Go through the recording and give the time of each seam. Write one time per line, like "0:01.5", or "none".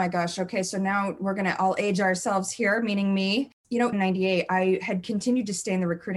0:03.9